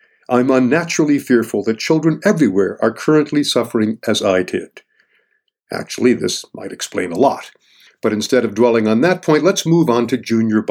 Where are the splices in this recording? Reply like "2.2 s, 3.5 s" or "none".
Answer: none

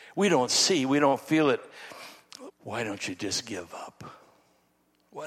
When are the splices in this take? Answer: 2.5 s

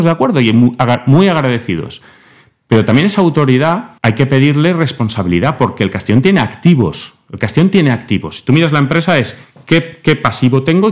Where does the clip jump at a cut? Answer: 4.0 s

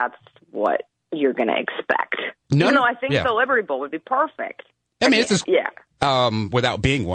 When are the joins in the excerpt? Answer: 2.4 s, 5.4 s

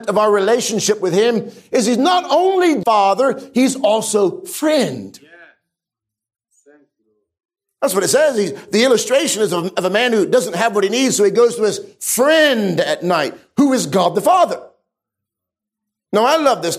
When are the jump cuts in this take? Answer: 2.8 s

